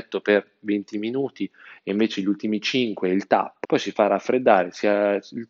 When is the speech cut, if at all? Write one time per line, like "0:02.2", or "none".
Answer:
0:03.6